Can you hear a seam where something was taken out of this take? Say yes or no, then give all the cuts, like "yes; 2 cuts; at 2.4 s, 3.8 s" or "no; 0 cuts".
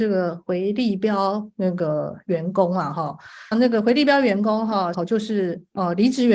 yes; 2 cuts; at 3.5 s, 4.9 s